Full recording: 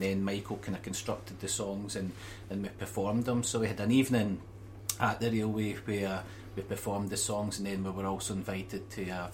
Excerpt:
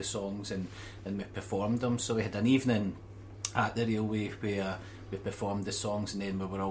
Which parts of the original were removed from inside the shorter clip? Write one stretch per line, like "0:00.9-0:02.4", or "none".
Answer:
none